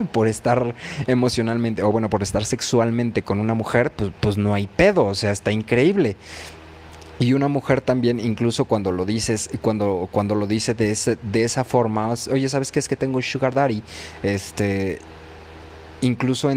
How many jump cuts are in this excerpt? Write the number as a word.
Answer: zero